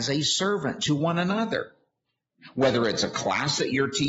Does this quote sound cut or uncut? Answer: uncut